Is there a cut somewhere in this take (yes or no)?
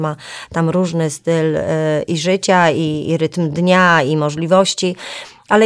no